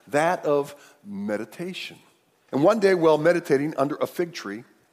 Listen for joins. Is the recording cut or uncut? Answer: cut